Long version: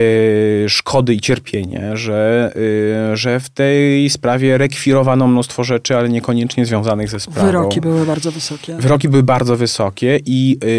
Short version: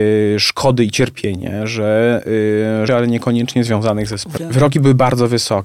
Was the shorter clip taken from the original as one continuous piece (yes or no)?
no